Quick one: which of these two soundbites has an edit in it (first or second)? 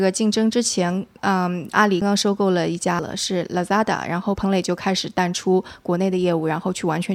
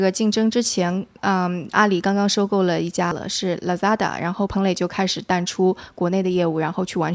first